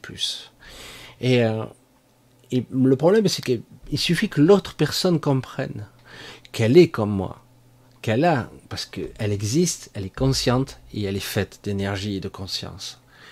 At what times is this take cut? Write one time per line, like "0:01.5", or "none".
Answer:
0:01.2